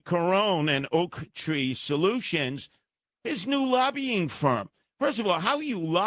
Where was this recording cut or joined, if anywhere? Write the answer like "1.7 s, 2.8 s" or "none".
none